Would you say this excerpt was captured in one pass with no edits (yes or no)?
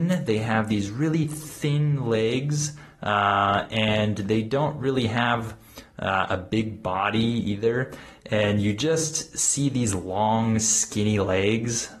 yes